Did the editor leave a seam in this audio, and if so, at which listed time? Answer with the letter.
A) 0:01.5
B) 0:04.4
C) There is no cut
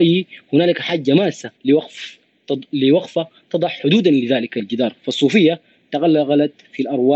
A